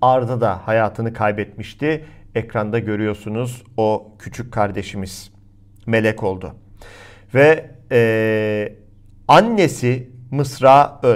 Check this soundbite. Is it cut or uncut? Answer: uncut